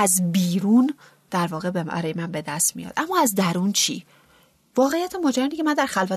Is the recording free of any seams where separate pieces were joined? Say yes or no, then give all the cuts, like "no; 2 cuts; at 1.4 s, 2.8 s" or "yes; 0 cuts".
yes; 0 cuts